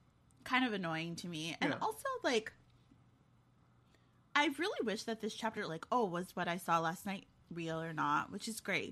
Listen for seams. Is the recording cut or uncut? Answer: cut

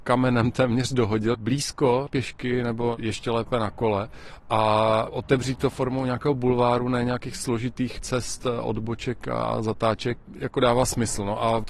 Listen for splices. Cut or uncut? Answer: uncut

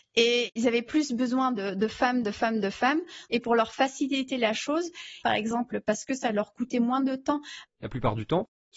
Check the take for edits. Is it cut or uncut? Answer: cut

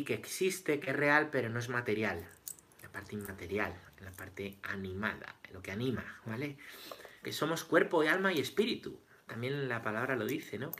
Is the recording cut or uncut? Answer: cut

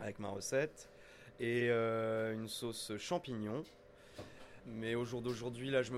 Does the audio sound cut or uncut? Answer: cut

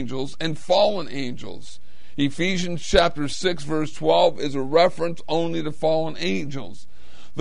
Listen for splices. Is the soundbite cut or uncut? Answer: uncut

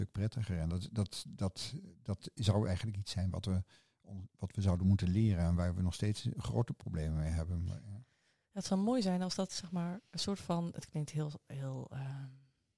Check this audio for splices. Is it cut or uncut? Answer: uncut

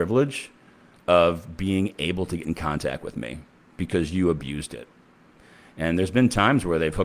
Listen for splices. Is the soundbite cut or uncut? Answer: uncut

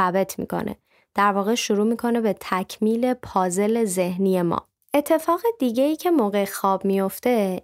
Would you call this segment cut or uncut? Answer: cut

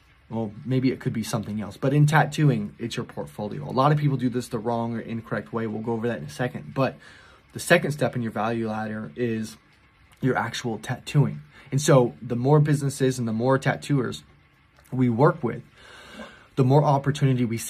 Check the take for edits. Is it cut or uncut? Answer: uncut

